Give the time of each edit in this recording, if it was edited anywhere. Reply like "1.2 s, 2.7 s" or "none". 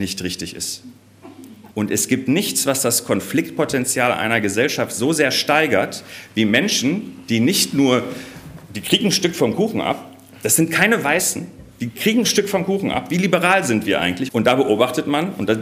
1.7 s, 14.3 s